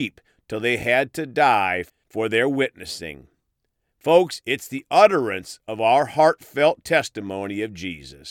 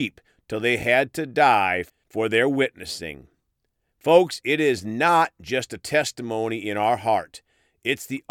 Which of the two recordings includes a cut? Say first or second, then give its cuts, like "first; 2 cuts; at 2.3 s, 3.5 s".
first; 1 cut; at 4.4 s